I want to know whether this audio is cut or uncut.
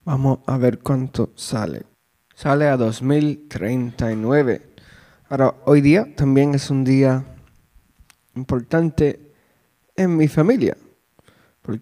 uncut